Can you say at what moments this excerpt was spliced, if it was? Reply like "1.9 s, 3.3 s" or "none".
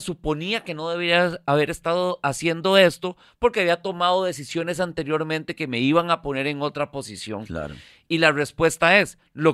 none

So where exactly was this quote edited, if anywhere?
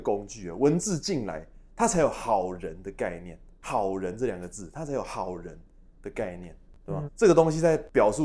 7.1 s

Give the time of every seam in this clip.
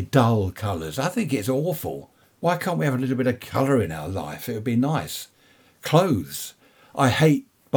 none

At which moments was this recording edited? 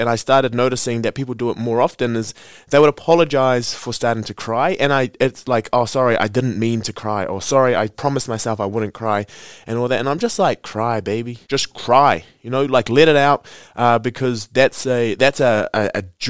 11.4 s

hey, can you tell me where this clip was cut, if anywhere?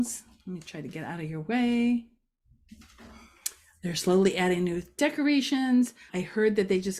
6.1 s

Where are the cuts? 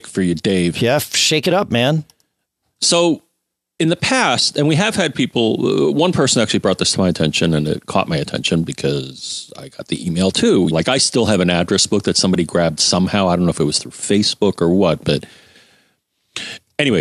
10.7 s

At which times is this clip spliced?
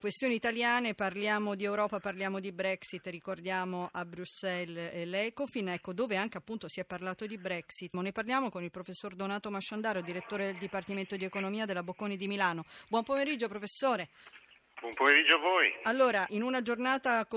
7.9 s, 16.3 s

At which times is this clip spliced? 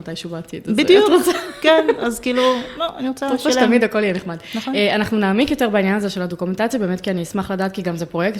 none

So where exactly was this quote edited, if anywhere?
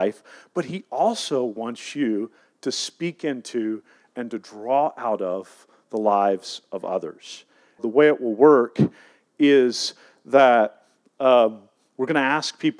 7.8 s

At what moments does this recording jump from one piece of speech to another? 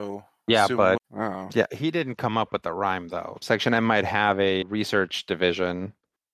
1.0 s, 3.4 s, 4.6 s

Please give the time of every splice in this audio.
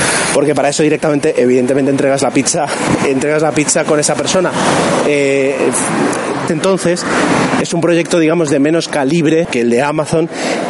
6.5 s, 9.4 s

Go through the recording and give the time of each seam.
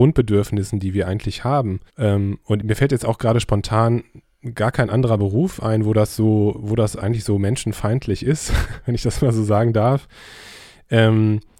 1.9 s

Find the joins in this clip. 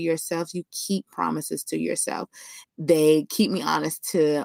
2.6 s

